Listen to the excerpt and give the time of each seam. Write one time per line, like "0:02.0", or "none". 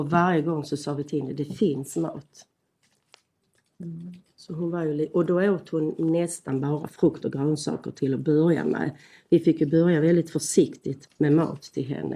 0:11.1